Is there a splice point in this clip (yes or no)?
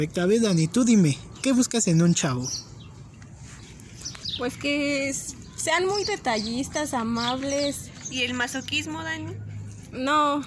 no